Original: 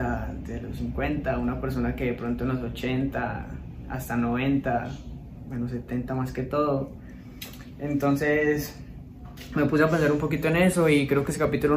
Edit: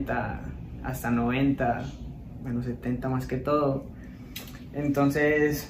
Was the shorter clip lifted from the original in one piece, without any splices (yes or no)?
yes